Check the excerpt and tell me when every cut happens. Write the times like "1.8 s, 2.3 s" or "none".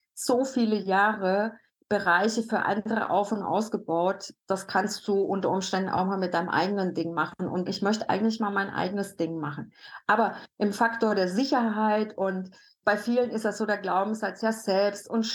7.7 s